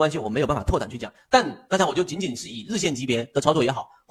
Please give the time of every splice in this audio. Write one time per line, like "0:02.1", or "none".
none